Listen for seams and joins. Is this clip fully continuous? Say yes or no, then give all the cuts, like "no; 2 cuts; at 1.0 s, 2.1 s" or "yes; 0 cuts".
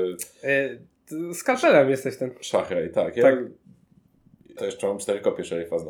no; 1 cut; at 4.6 s